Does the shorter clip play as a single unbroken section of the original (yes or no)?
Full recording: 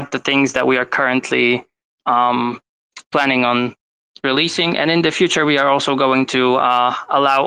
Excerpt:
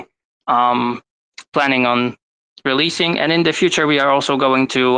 yes